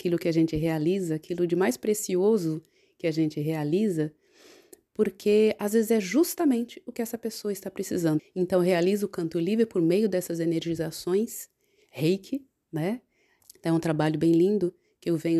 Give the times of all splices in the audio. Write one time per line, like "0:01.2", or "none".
0:08.2
0:13.4